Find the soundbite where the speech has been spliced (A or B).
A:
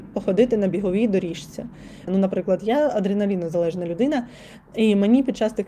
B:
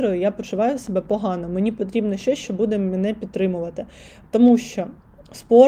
A